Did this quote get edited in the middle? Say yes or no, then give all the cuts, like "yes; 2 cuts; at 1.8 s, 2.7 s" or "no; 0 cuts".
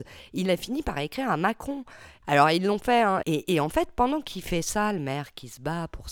yes; 2 cuts; at 2.2 s, 3.2 s